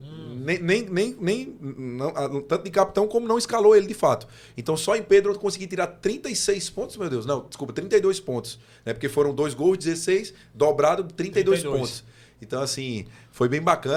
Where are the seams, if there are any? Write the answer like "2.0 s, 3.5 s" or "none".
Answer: none